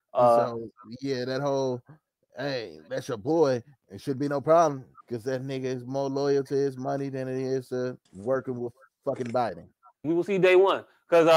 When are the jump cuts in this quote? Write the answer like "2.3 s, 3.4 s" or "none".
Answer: 5.0 s, 8.1 s, 10.0 s

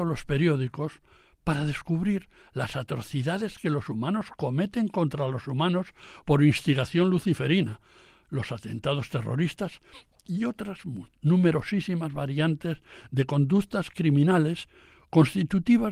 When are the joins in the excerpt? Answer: 8.2 s

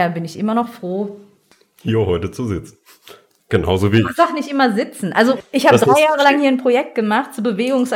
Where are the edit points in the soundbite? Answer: none

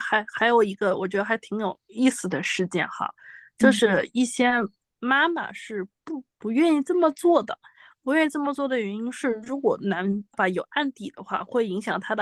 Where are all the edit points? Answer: 10.3 s

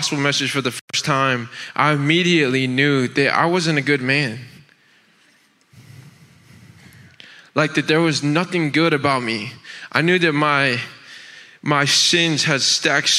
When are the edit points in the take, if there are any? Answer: none

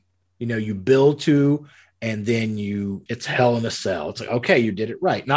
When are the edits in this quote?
3.1 s

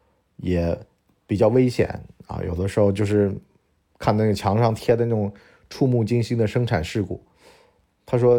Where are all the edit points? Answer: none

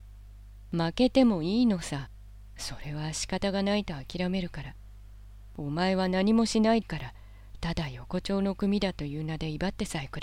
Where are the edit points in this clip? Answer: 6.8 s

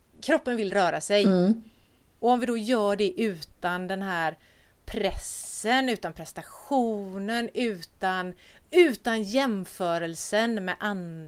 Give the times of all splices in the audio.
none

